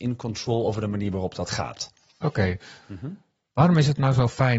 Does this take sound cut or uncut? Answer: cut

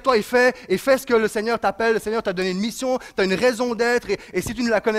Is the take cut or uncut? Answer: uncut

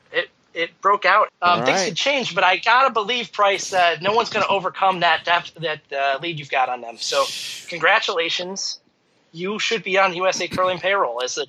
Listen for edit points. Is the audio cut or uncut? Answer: cut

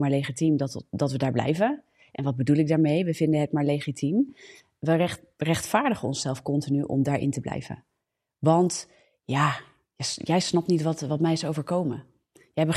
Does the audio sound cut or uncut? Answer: uncut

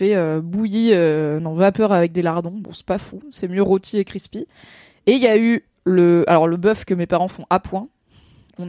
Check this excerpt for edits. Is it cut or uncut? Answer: uncut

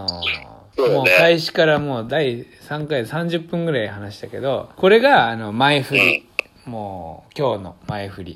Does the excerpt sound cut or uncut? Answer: cut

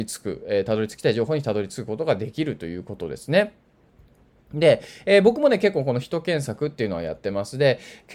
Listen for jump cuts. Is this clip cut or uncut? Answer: uncut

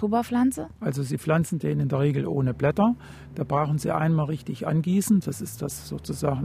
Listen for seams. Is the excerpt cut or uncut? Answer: uncut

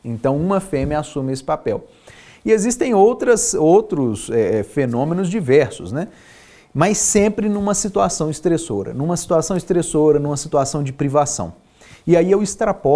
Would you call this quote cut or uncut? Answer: uncut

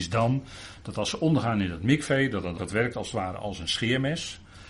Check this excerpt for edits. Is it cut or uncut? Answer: cut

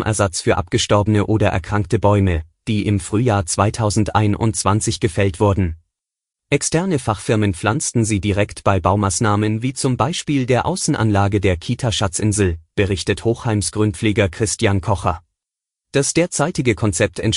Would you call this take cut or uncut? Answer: cut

